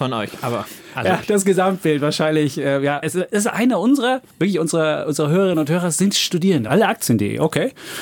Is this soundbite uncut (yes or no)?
no